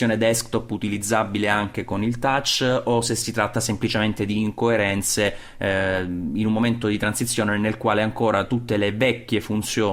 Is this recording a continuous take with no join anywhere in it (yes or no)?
yes